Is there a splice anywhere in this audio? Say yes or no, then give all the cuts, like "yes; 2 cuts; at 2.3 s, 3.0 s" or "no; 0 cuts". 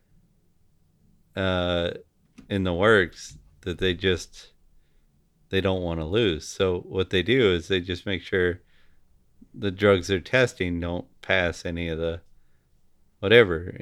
no; 0 cuts